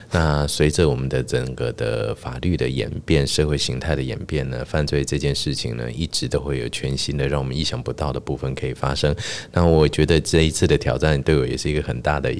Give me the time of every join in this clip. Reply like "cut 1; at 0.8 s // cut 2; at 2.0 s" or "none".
none